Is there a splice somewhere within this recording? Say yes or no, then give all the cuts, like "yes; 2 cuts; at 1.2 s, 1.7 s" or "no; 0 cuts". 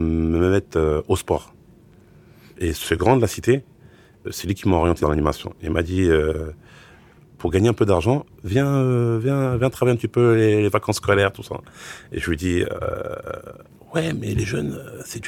no; 0 cuts